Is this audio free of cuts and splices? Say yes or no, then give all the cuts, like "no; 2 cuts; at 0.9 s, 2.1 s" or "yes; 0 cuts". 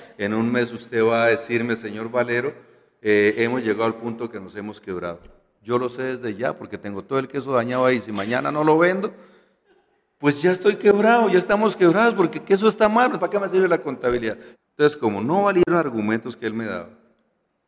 no; 2 cuts; at 13.2 s, 14.5 s